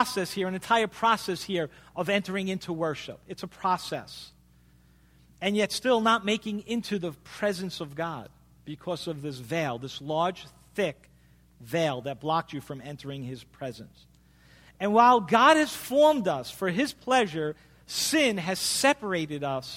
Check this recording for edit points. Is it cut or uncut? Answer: uncut